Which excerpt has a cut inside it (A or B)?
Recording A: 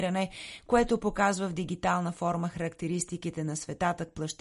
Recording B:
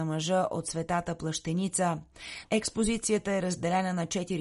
B